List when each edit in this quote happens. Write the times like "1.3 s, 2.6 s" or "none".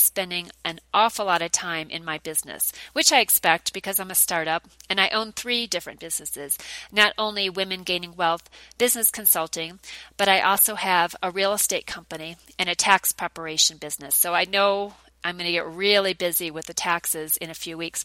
none